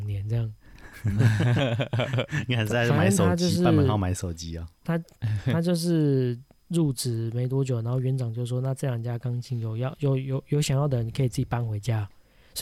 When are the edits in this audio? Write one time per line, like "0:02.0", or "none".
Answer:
none